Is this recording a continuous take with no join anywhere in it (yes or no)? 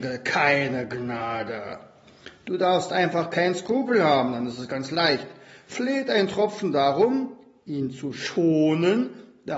yes